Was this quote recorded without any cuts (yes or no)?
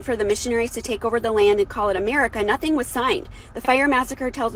yes